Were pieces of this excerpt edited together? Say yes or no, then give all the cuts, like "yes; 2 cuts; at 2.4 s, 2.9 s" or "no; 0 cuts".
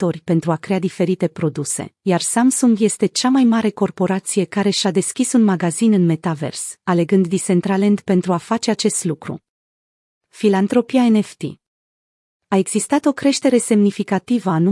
no; 0 cuts